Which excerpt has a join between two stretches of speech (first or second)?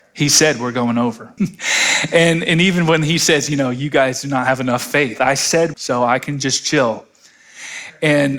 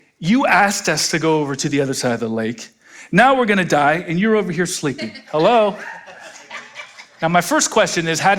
first